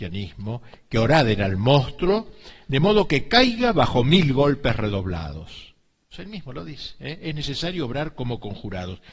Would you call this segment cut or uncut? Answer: cut